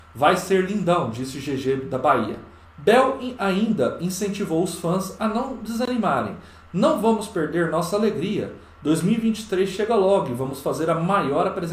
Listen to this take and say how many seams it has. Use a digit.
1